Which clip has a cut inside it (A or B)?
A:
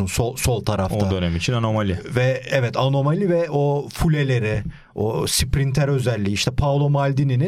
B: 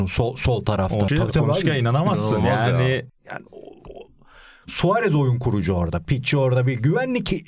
B